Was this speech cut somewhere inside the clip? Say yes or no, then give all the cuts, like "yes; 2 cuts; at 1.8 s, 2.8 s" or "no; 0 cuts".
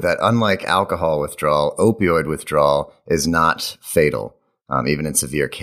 no; 0 cuts